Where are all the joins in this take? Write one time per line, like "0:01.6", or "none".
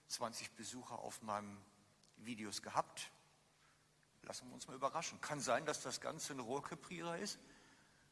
0:04.1